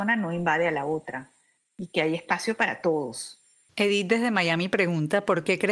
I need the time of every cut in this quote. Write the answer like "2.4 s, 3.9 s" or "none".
3.7 s